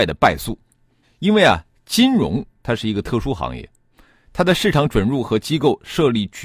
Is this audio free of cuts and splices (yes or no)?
no